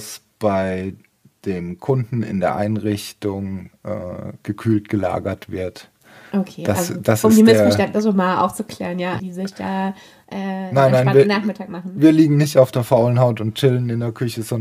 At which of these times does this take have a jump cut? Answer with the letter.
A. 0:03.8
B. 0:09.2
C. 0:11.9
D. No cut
B